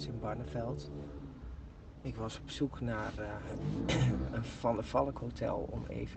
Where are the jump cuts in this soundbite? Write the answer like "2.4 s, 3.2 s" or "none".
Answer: none